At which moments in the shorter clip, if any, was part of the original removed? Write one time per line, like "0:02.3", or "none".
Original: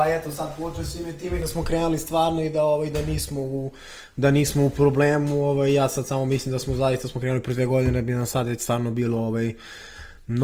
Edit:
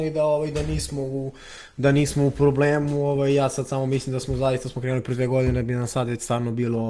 none